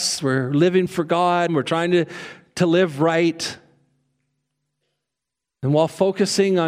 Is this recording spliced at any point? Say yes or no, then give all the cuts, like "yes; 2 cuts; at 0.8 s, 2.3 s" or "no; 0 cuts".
yes; 1 cut; at 1.5 s